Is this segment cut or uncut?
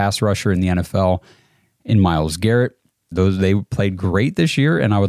cut